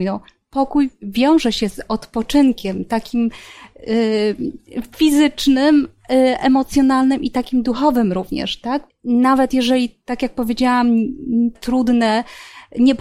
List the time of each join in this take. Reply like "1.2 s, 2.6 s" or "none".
8.9 s, 11.5 s